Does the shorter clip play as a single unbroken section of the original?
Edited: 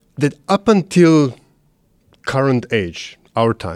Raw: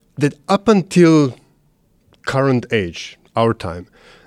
yes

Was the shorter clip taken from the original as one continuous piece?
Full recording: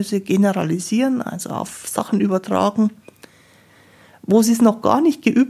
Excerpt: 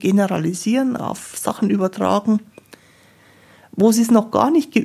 no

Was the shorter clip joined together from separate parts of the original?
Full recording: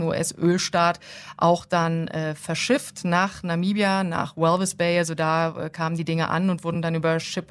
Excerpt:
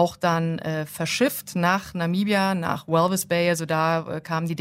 no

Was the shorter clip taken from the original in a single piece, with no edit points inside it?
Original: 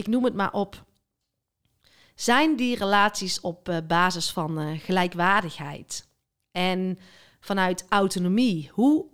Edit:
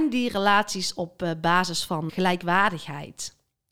no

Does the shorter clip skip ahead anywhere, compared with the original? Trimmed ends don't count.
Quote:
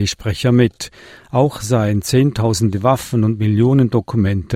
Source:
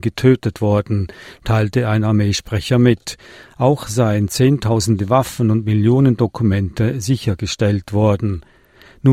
no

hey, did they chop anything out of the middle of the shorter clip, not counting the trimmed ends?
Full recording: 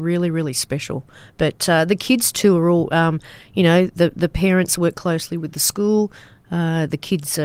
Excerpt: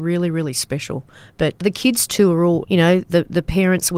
yes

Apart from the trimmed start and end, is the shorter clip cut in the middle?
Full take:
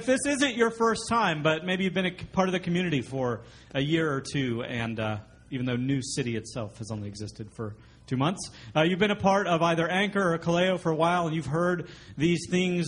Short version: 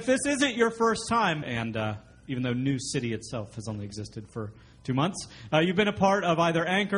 yes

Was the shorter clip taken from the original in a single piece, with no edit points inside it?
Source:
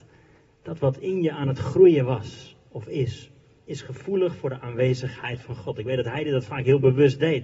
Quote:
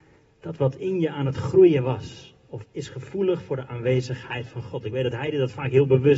no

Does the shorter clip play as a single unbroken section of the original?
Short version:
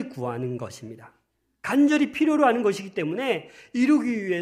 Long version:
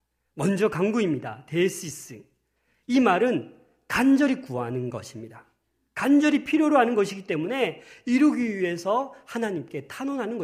yes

